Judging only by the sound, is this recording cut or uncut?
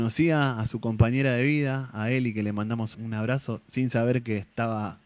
cut